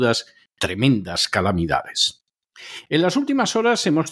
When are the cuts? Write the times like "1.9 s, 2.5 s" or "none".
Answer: none